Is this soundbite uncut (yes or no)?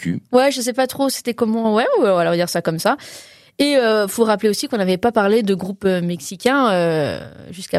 yes